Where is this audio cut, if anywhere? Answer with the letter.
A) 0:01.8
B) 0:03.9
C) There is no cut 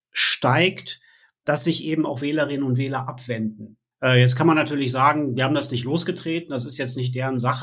B